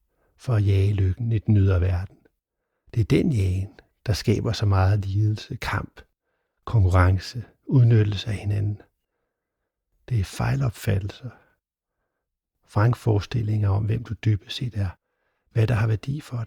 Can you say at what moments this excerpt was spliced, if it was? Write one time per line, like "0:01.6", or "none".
none